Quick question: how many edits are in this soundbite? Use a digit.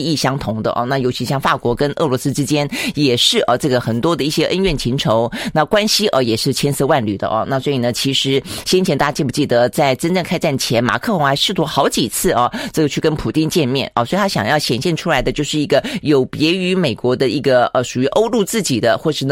0